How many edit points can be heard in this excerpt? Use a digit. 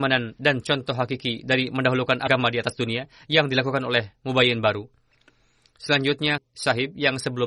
1